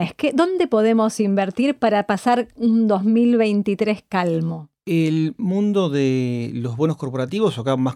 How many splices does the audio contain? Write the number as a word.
zero